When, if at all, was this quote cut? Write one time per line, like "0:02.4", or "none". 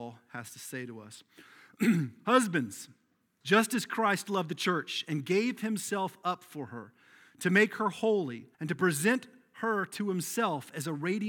0:03.4
0:08.5